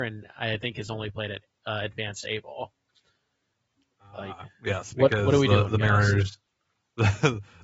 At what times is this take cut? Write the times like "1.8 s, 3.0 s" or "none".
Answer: none